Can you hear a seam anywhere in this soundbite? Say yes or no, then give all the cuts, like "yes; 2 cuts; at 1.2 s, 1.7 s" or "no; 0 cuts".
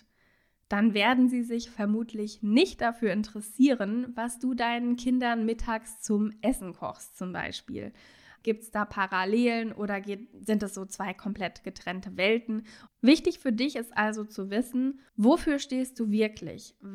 yes; 3 cuts; at 8.4 s, 12.9 s, 15.1 s